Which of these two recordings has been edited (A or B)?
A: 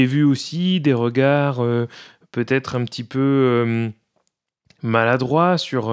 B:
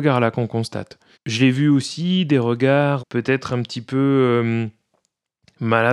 B